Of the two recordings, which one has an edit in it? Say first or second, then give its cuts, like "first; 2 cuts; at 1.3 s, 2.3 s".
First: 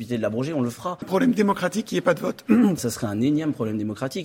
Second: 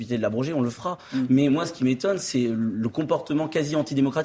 first; 2 cuts; at 1.0 s, 2.8 s